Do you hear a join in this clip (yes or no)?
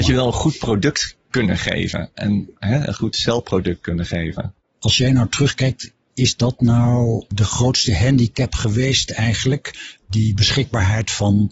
no